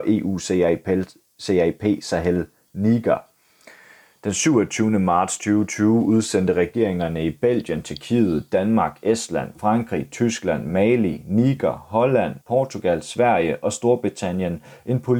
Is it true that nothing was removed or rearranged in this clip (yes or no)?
no